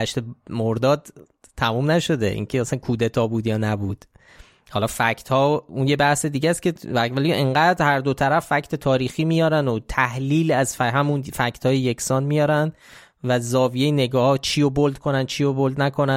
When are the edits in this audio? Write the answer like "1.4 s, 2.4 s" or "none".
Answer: none

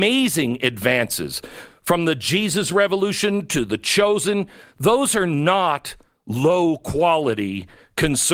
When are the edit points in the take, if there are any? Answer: none

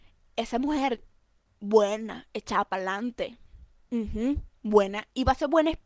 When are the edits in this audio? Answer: none

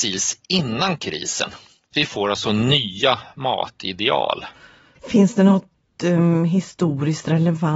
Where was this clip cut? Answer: none

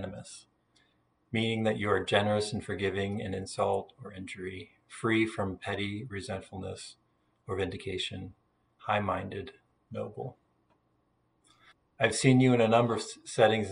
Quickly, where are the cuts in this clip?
none

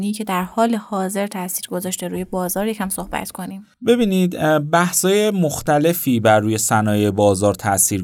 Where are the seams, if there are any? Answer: 3.7 s

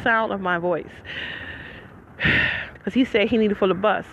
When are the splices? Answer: 2.8 s

